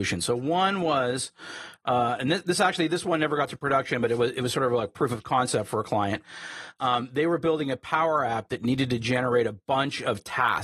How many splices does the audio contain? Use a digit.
0